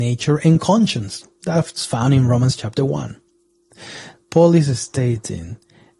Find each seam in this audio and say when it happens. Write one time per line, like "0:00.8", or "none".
0:04.1

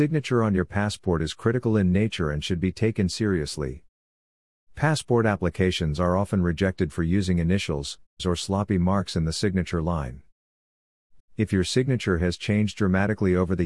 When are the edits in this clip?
0:08.2
0:11.2

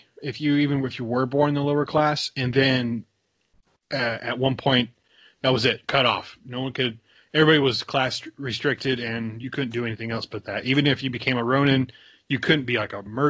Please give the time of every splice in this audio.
none

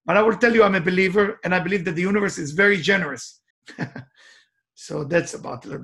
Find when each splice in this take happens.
0:03.5

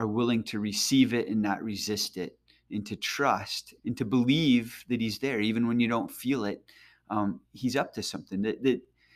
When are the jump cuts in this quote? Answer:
0:03.8

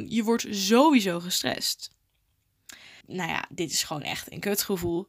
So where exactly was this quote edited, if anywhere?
0:03.0

